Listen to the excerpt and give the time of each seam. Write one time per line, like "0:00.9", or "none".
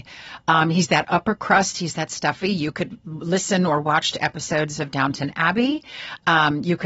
none